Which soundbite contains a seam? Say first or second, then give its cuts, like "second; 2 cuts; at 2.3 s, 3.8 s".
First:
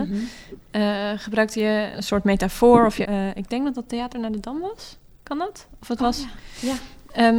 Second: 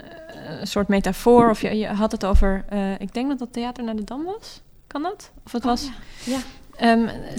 first; 2 cuts; at 1.9 s, 3.0 s